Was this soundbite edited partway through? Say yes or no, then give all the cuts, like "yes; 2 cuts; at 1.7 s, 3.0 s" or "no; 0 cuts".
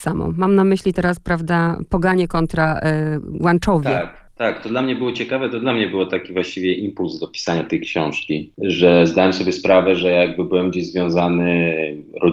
no; 0 cuts